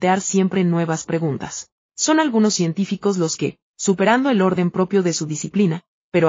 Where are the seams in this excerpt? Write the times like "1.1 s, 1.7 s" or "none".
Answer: 1.8 s